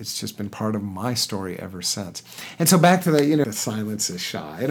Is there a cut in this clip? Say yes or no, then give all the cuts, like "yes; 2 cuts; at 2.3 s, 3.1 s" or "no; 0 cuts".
yes; 1 cut; at 3.4 s